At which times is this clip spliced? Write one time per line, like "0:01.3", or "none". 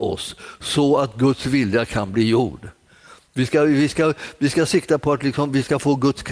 none